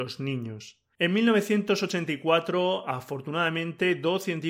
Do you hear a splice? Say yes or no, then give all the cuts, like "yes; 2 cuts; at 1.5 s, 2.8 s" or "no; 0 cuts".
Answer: yes; 1 cut; at 0.9 s